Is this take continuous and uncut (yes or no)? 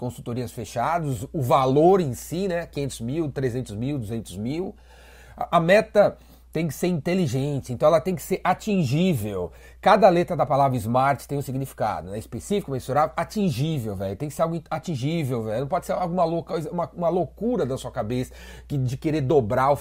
yes